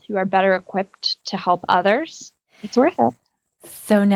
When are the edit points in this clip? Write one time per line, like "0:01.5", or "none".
0:02.5